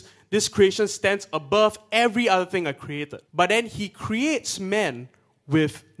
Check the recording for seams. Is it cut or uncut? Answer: cut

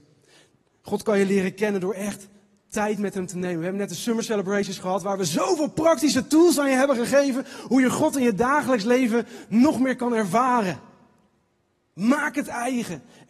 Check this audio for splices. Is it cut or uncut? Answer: uncut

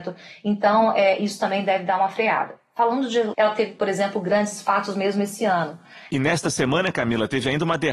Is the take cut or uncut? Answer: cut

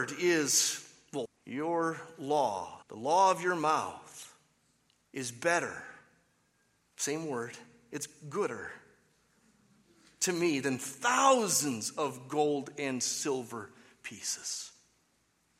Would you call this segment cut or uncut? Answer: cut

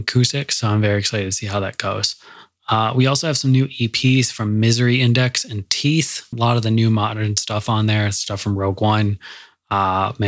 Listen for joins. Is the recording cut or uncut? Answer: cut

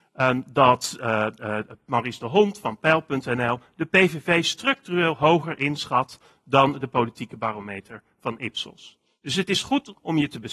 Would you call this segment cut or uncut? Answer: uncut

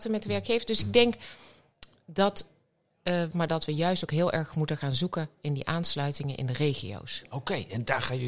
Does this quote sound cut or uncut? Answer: cut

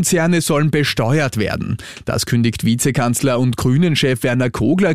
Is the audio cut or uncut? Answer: uncut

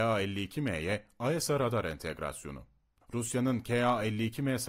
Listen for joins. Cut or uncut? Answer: uncut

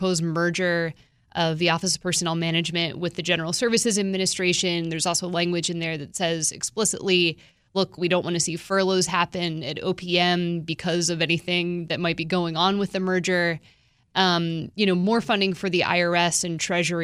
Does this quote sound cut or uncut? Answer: uncut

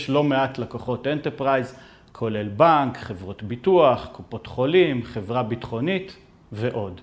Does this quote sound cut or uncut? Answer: uncut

